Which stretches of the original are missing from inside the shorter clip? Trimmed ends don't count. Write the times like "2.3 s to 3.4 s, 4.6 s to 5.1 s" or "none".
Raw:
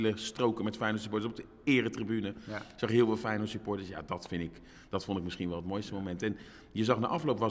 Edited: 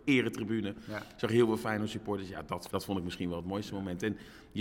4.3 s to 4.9 s